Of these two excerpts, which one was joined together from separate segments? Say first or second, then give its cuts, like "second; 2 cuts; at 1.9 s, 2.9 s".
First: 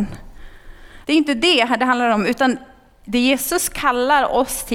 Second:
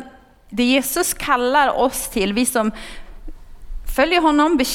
first; 1 cut; at 1.0 s